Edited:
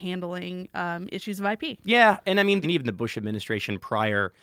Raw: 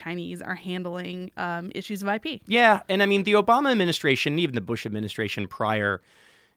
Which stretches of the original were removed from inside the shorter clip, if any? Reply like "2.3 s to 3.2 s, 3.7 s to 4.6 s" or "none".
3.2 s to 4.3 s